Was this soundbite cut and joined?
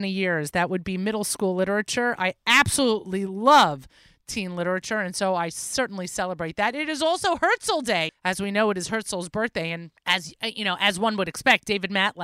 yes; 2 cuts; at 8.1 s, 10.0 s

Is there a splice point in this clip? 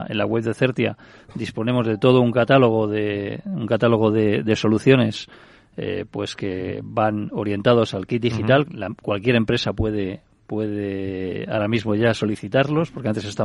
yes; 1 cut; at 8.7 s

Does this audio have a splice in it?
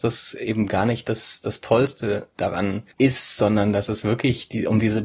yes; 1 cut; at 2.9 s

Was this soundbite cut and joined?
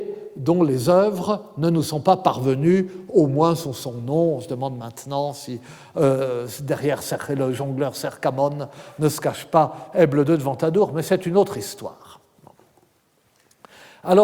no; 0 cuts

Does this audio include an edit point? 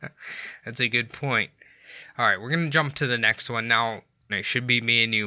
yes; 1 cut; at 4.3 s

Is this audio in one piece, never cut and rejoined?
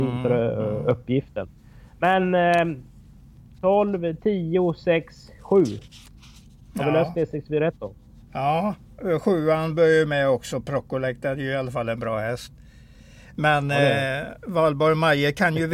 yes; 0 cuts

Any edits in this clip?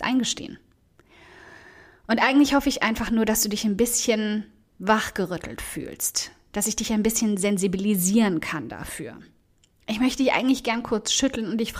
no; 0 cuts

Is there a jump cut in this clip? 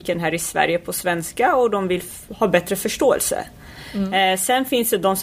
no; 0 cuts

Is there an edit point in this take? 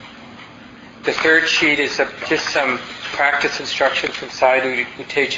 yes; 2 cuts; at 1.0 s, 2.2 s

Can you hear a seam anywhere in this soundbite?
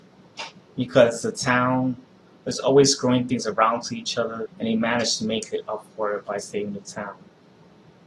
yes; 2 cuts; at 2.3 s, 4.5 s

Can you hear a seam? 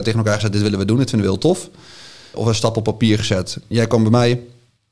yes; 2 cuts; at 2.3 s, 3.7 s

